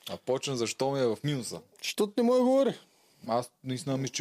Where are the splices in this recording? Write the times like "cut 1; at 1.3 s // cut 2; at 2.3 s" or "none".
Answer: cut 1; at 3.3 s